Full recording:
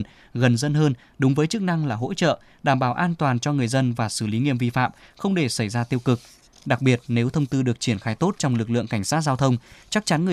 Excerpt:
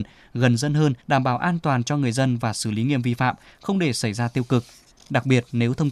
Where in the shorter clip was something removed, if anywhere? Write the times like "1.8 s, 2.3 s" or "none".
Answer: 1.0 s